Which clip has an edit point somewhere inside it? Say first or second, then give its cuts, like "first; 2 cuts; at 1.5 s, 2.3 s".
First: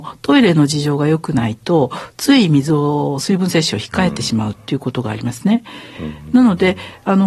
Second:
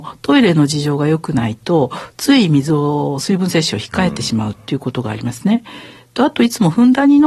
first; 1 cut; at 5.9 s